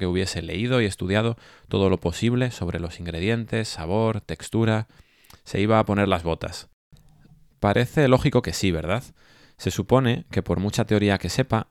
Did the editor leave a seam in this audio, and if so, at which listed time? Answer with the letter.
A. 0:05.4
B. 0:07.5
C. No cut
B